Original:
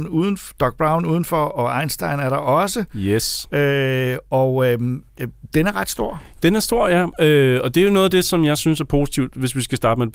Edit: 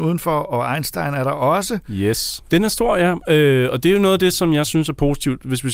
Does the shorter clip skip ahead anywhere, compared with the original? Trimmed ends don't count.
yes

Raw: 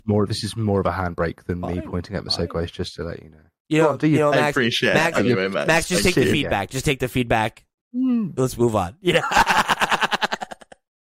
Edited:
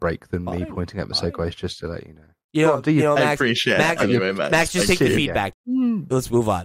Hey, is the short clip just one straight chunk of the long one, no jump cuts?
no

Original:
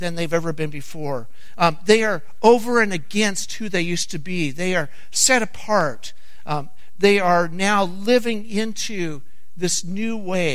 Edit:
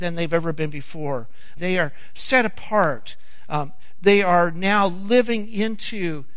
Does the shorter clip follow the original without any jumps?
no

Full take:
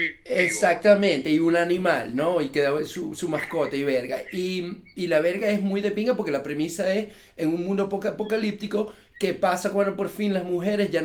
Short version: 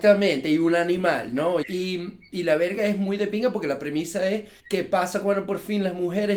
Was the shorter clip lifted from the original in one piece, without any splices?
no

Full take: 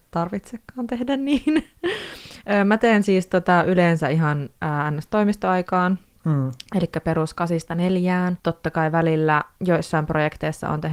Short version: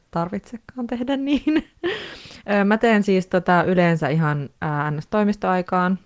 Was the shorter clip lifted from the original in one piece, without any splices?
yes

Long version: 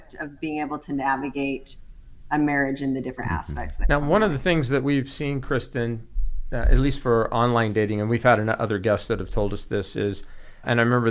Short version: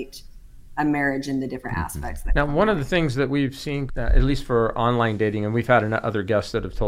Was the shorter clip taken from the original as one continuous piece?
no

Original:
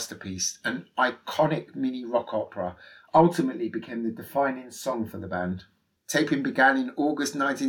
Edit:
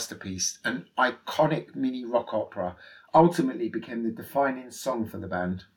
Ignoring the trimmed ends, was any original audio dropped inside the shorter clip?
no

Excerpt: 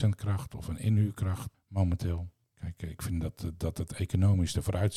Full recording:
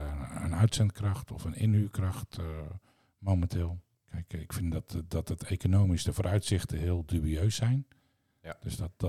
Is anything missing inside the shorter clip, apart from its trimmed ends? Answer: yes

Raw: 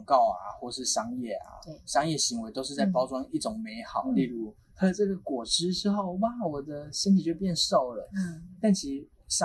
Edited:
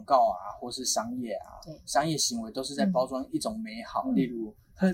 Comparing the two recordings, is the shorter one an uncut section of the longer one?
yes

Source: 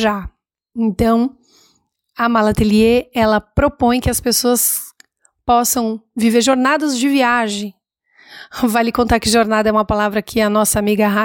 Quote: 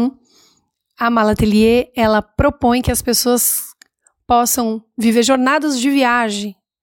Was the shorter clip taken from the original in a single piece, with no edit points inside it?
yes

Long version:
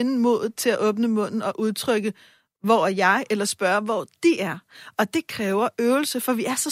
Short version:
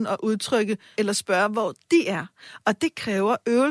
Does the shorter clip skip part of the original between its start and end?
yes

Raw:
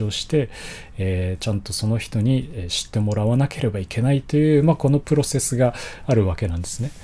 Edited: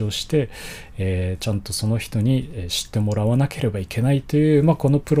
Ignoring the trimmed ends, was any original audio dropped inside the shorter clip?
no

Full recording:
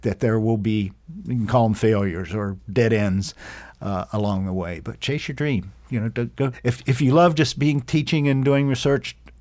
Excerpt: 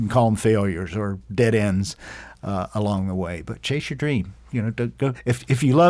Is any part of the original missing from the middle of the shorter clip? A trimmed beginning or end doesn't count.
no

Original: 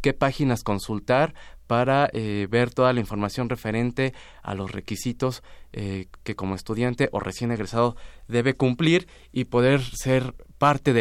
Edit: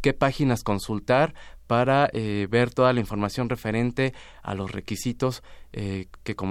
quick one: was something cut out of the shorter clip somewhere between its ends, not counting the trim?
no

